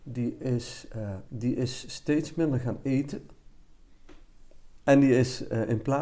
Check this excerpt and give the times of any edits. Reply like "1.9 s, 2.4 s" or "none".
1.3 s, 4.8 s

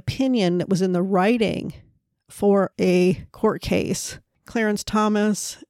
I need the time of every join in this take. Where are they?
4.3 s

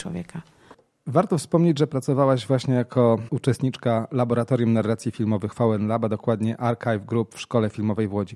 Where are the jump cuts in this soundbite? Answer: none

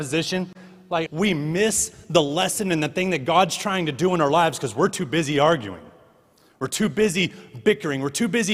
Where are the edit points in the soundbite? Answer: 1.1 s

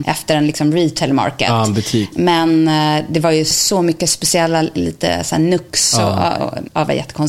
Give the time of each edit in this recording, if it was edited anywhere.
6.4 s

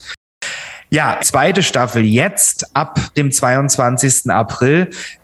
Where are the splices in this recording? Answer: 1.2 s

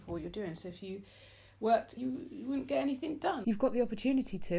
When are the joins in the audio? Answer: 2.0 s, 3.4 s

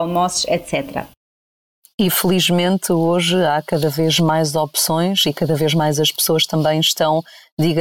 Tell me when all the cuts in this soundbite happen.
none

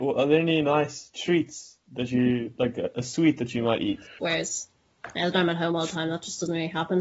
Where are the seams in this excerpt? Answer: 4.2 s

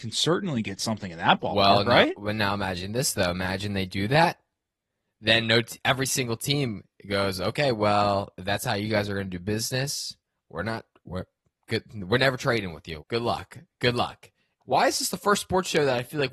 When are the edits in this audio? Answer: 13.0 s, 14.6 s

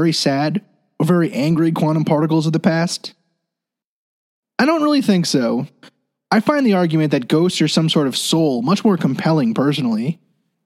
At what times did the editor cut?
none

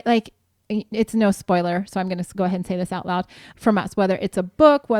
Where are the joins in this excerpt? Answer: 3.5 s

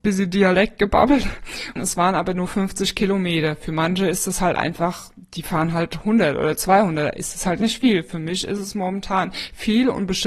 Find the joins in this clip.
1.8 s

